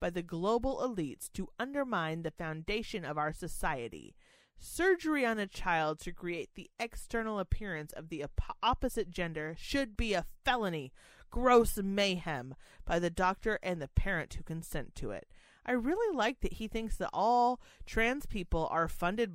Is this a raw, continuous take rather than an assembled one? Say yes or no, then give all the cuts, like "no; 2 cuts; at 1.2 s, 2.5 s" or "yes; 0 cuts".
yes; 0 cuts